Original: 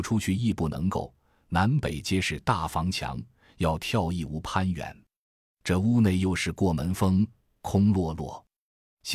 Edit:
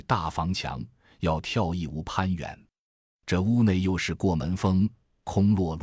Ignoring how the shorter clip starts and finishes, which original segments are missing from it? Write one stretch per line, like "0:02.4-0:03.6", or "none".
none